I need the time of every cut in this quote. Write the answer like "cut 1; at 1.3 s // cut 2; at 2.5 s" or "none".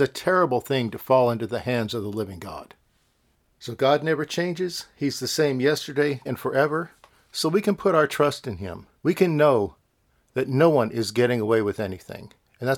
cut 1; at 6.3 s // cut 2; at 9.0 s